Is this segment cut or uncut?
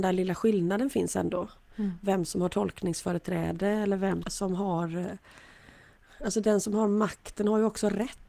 cut